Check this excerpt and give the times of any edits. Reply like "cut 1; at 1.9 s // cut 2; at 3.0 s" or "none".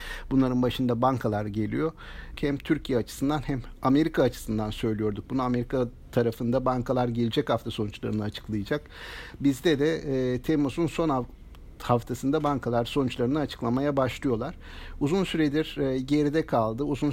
cut 1; at 2.4 s